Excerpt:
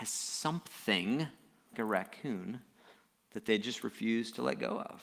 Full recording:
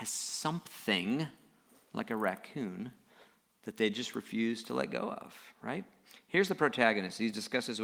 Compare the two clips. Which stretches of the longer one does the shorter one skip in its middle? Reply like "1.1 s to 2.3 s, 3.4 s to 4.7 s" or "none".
1.7 s to 2.0 s

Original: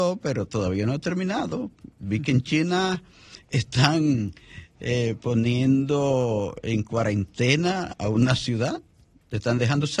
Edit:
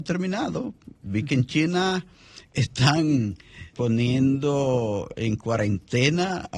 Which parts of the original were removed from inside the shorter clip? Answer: 4.7 s to 5.2 s

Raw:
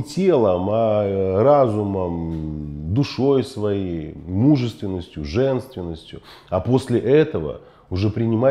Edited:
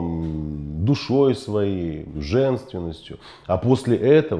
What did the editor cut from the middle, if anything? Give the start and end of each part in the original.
4.2 s to 5.2 s

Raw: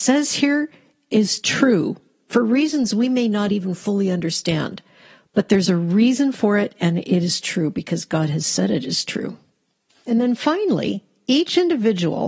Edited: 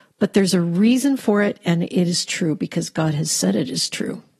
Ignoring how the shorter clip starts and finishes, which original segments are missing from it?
none

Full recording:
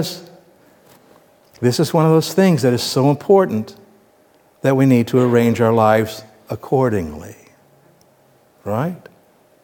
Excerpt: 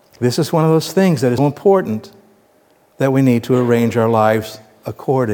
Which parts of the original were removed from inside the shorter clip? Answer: 2.8 s to 3.0 s

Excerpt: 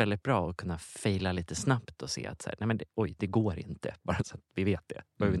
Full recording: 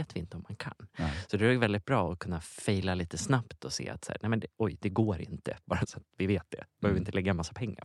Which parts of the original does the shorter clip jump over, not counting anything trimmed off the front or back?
none

